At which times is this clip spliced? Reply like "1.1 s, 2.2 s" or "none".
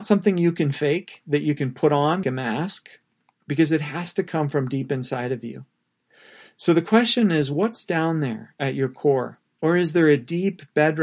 2.2 s, 9.6 s